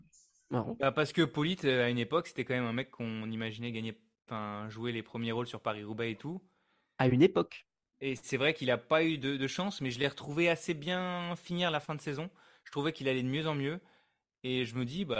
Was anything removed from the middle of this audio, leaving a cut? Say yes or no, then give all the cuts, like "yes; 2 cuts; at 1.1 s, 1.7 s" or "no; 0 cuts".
no; 0 cuts